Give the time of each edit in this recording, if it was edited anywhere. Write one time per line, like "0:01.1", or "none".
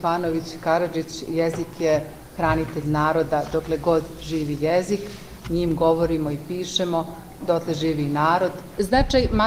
0:05.4
0:07.4